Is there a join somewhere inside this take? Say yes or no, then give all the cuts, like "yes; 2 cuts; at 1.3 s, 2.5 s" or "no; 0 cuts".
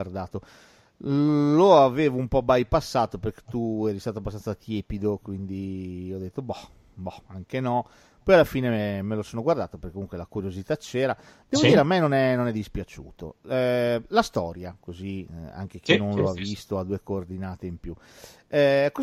no; 0 cuts